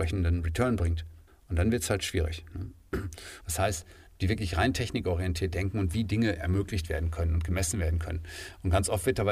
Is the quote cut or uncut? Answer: cut